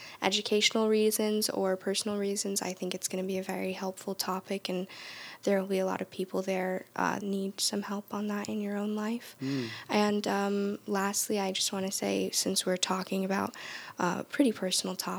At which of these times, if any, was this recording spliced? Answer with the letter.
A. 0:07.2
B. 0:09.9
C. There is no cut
A